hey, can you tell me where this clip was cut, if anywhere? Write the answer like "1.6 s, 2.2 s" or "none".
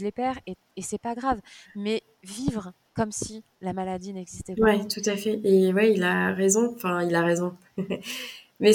none